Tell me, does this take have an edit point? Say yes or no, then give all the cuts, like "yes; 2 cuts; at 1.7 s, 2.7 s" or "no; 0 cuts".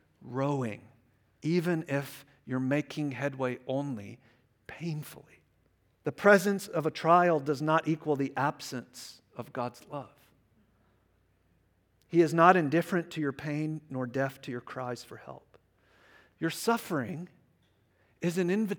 yes; 1 cut; at 5.9 s